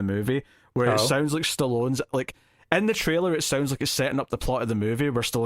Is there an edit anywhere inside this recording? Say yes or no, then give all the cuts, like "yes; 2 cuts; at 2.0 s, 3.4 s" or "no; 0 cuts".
no; 0 cuts